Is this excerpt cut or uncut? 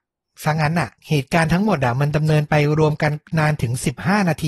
cut